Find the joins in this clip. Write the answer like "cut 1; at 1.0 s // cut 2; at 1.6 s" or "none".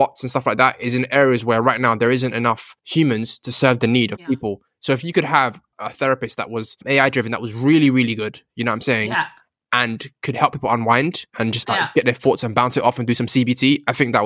cut 1; at 5.7 s